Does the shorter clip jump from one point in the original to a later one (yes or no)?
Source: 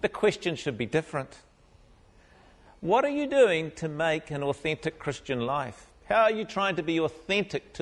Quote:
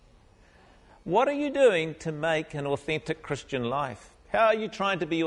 no